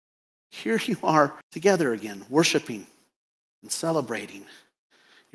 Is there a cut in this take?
yes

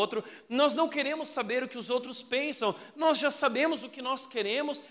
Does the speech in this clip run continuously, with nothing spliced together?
yes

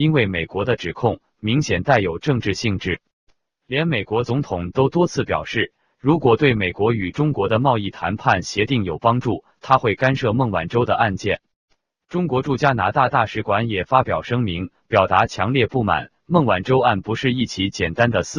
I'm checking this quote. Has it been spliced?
no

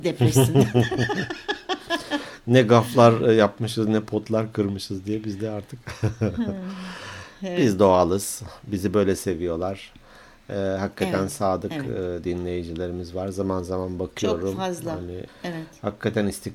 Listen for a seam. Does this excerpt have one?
yes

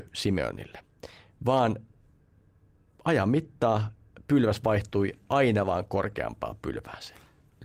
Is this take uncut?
yes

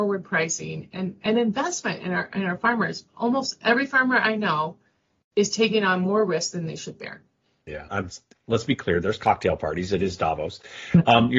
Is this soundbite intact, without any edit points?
no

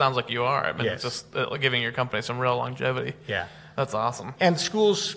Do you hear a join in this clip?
no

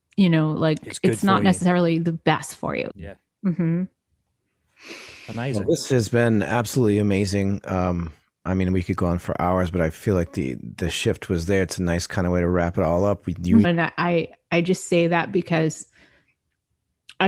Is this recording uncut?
no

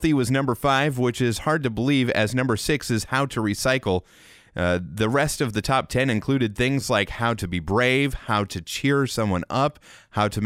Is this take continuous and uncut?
yes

